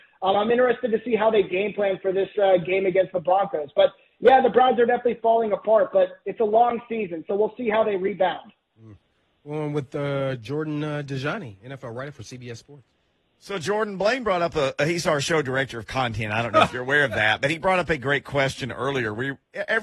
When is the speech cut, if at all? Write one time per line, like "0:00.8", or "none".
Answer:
none